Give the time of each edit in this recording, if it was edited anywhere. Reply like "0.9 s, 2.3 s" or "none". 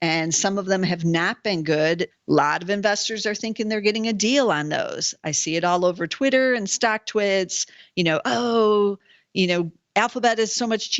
2.1 s